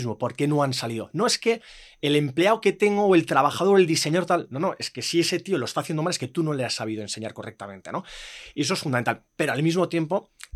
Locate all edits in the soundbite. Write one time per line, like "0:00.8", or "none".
none